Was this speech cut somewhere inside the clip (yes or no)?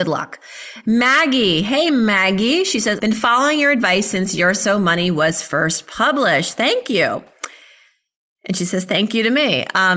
yes